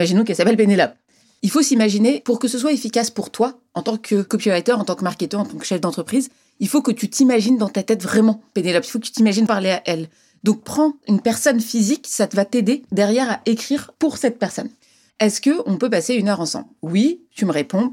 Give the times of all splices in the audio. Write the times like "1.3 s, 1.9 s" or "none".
9.5 s, 15.1 s